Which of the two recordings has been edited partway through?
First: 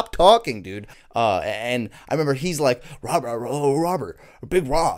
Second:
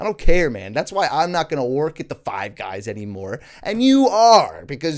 first; 1 cut; at 0.9 s

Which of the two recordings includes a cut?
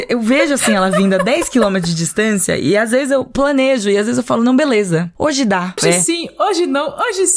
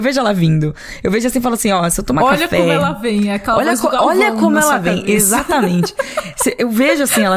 first; 1 cut; at 5.8 s

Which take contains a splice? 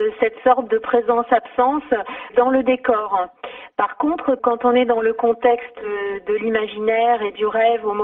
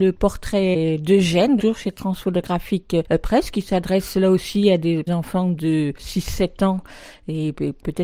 second; 1 cut; at 1.6 s

